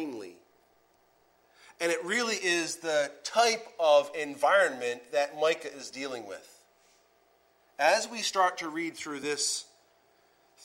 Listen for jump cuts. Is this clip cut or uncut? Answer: uncut